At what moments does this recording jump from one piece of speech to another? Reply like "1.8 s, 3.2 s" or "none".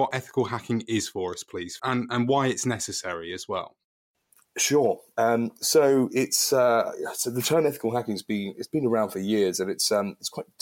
1.8 s